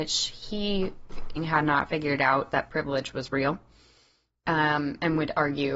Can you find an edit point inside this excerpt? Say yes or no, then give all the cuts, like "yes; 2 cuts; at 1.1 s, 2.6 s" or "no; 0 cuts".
yes; 1 cut; at 1.4 s